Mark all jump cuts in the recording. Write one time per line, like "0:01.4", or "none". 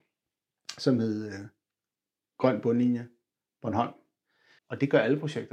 0:04.6